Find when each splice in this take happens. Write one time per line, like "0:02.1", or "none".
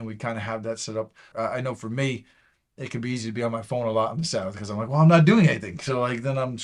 0:01.3